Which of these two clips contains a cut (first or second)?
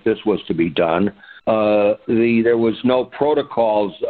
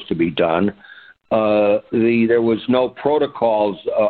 first